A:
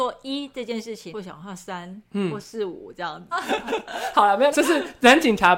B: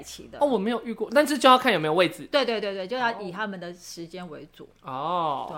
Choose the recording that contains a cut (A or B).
A